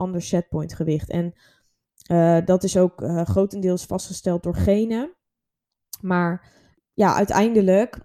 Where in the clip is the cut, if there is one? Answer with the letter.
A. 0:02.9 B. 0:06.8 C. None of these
C